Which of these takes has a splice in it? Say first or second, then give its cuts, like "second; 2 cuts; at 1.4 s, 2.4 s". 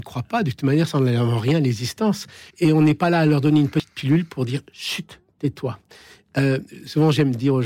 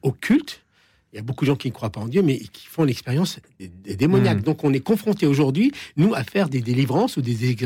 first; 1 cut; at 2.5 s